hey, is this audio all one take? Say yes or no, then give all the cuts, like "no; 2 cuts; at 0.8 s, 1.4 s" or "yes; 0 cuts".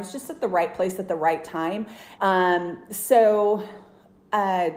no; 1 cut; at 2.2 s